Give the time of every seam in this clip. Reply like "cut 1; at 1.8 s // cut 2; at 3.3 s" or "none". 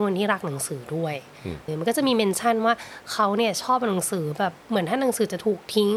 cut 1; at 1.7 s // cut 2; at 4.6 s

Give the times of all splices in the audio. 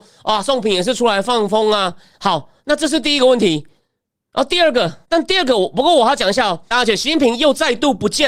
cut 1; at 2.1 s // cut 2; at 5.0 s // cut 3; at 6.7 s

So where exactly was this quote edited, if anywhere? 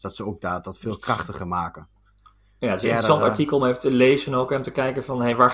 none

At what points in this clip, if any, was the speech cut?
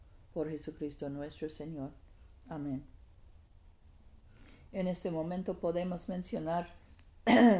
none

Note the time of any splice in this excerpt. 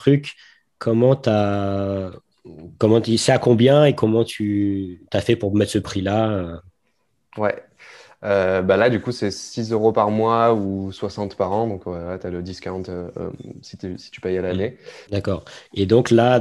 cut 1; at 15.1 s

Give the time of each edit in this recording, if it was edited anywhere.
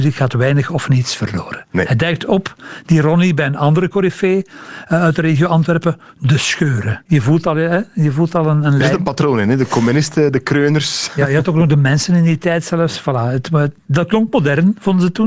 none

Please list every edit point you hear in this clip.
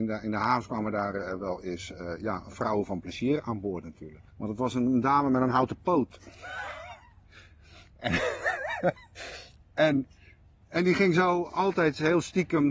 cut 1; at 4.3 s

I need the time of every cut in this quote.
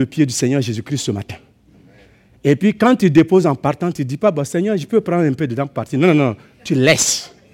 none

